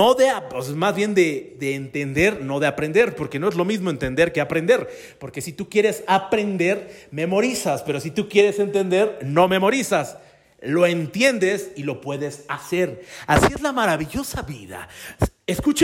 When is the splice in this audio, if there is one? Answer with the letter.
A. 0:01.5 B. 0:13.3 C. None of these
C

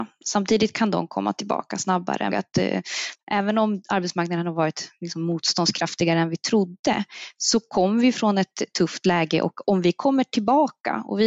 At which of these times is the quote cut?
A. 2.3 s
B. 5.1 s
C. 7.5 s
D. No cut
A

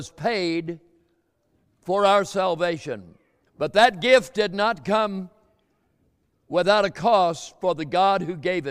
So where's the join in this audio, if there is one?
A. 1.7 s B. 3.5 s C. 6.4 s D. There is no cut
B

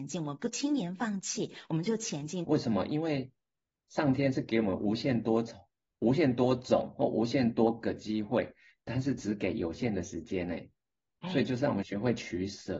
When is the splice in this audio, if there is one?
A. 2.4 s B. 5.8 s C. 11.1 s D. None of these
A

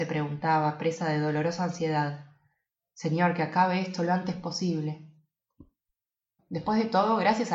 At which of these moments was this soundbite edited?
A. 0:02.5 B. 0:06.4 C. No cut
B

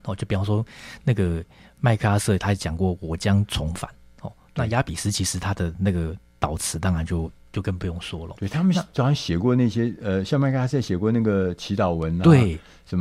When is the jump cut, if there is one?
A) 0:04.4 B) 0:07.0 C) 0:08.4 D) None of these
D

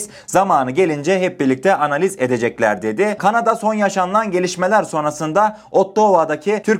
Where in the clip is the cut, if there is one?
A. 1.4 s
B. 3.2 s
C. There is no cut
B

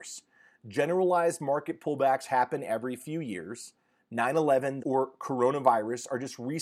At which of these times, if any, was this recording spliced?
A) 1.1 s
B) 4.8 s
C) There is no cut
B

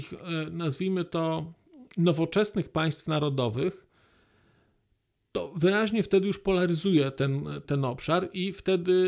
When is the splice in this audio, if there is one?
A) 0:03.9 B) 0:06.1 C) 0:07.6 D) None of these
C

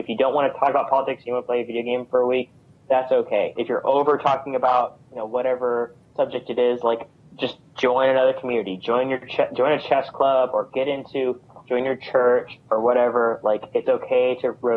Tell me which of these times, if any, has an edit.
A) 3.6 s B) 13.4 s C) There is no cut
A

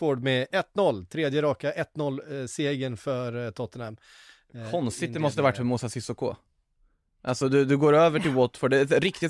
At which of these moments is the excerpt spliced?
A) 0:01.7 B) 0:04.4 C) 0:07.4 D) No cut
D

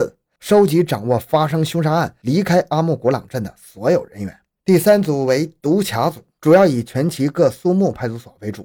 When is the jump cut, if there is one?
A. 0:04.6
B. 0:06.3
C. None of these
A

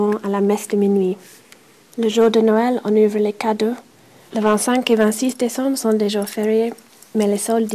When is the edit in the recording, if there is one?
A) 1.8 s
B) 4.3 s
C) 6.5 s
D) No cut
B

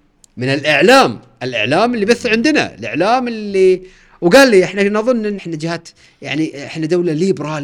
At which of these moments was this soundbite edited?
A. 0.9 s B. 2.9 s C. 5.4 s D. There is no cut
C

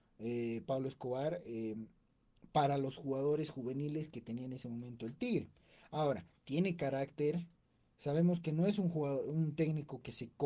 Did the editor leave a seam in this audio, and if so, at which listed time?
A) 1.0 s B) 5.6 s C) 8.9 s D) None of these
D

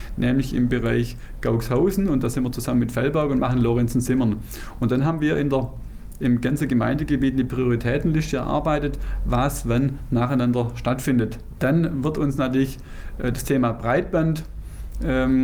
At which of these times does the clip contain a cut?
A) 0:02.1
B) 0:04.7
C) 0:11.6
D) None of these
C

